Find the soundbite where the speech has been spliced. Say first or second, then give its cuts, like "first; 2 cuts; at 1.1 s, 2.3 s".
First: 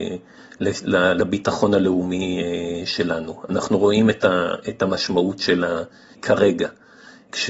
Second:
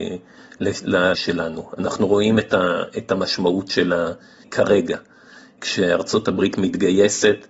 second; 1 cut; at 1.1 s